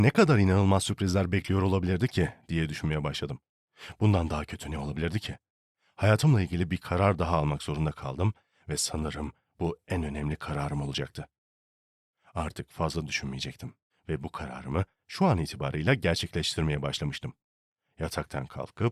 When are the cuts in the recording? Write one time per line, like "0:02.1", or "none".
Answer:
0:13.9